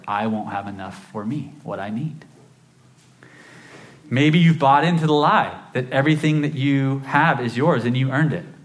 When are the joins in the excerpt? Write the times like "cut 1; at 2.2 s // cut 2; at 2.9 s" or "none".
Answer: none